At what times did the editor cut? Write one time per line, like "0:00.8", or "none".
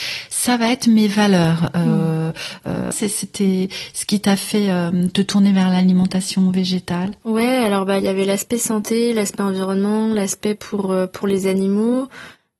0:02.9